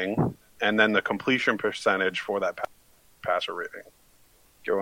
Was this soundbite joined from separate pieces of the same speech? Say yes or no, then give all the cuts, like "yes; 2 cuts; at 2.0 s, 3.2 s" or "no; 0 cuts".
no; 0 cuts